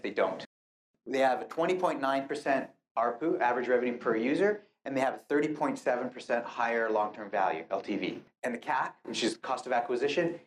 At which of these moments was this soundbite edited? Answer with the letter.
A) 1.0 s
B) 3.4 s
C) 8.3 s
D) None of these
D